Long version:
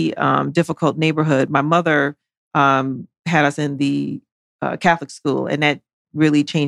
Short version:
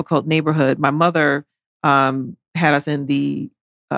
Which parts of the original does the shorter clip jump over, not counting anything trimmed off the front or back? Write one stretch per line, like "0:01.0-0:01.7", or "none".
none